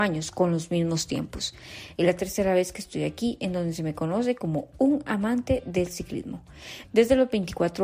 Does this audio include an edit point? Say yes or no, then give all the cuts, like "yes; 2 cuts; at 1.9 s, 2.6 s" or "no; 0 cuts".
yes; 2 cuts; at 1.9 s, 6.8 s